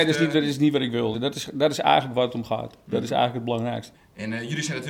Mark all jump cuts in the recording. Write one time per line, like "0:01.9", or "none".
0:01.1
0:03.9